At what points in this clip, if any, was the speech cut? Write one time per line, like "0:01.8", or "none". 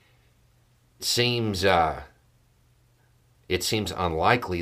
0:01.0